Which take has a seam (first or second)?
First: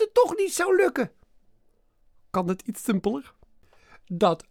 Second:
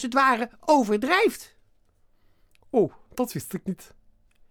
second